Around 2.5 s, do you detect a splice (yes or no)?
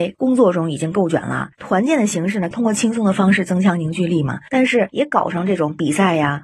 yes